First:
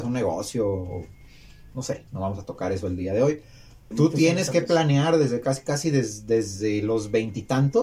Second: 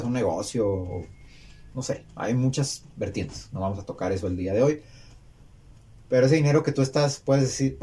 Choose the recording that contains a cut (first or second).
first